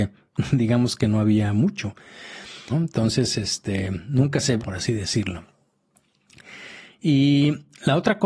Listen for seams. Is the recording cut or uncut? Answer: cut